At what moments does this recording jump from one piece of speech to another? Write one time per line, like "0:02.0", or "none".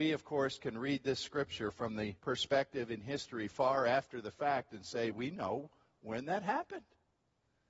0:02.2
0:05.1